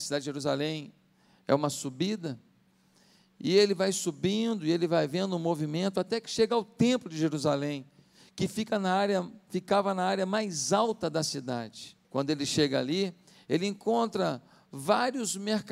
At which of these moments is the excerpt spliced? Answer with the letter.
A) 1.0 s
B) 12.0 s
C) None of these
B